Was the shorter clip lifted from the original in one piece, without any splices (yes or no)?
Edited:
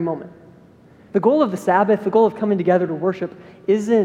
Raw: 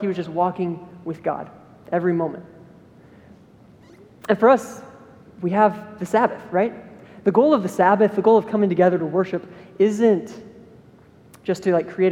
no